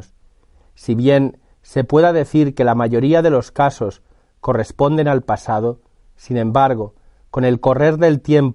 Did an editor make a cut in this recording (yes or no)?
no